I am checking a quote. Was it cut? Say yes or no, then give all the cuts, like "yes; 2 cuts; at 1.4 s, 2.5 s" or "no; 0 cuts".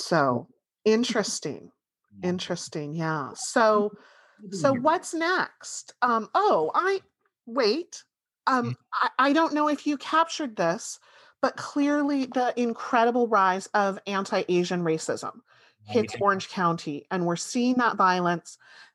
no; 0 cuts